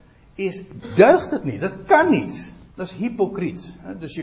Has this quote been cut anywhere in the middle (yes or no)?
yes